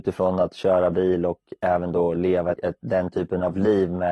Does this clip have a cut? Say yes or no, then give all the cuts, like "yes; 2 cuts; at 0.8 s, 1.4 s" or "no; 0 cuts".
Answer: yes; 1 cut; at 2.5 s